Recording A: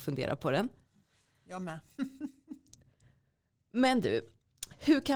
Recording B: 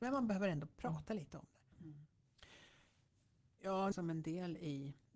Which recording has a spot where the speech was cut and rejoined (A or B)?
B